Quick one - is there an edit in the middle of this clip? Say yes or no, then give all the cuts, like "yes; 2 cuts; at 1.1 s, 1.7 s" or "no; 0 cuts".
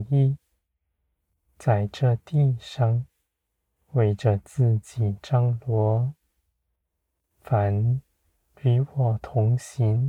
no; 0 cuts